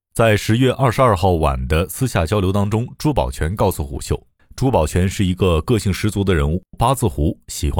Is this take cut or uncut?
cut